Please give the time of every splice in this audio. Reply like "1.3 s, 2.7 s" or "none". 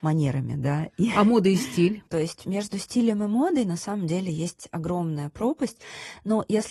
2.1 s